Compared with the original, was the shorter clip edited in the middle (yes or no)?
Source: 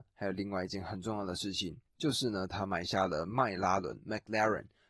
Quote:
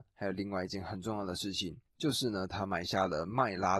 no